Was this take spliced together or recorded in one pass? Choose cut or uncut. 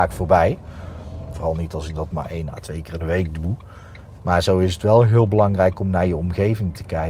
cut